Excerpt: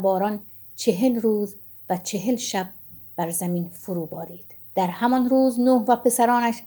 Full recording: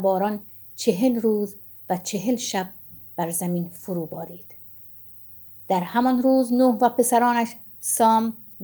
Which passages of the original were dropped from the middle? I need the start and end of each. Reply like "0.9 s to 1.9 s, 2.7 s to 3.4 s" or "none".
4.6 s to 5.6 s